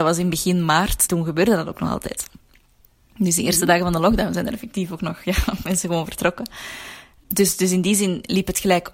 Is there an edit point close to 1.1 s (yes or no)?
yes